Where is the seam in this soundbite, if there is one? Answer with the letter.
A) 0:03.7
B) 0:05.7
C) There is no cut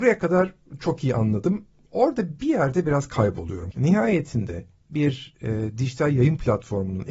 A